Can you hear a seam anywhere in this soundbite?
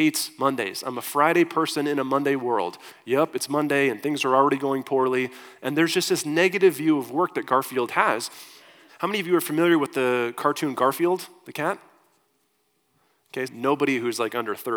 yes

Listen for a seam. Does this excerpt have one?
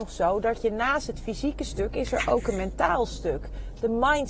no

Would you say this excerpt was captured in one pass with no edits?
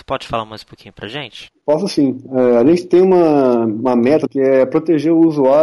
no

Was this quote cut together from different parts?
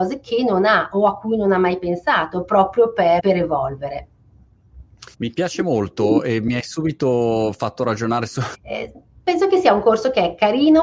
yes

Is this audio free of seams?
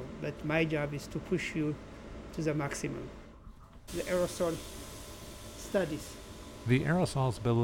no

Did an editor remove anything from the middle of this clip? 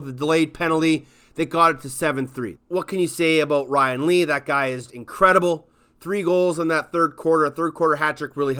yes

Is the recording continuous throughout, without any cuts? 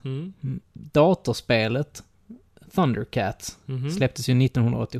yes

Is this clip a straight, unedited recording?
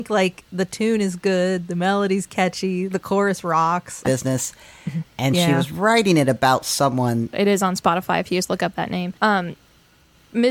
no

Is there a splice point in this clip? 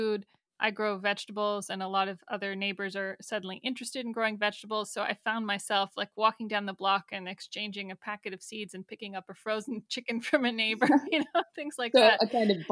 no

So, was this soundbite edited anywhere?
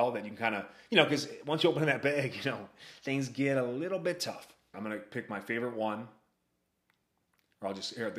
yes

